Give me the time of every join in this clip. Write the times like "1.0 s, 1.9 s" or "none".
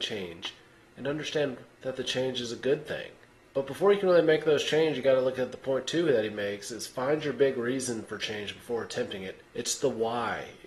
none